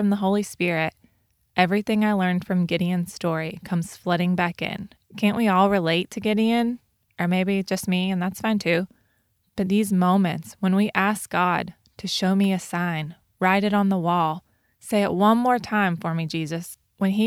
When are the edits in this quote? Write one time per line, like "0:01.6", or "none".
0:05.0